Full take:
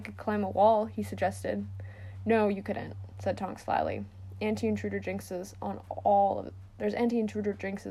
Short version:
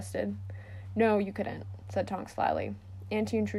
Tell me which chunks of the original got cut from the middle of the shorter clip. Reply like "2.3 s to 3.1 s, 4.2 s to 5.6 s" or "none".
none